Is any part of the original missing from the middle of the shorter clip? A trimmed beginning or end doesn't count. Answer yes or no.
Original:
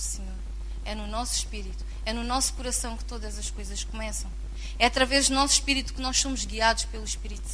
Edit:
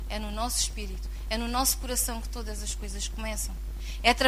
no